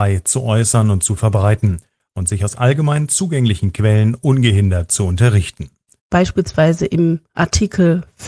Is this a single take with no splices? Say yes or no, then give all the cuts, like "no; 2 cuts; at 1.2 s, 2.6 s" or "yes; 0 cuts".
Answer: no; 1 cut; at 6.0 s